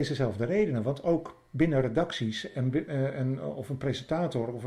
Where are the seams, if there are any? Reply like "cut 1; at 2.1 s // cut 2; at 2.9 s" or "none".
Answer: none